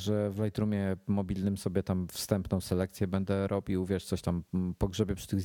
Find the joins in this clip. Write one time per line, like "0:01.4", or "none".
none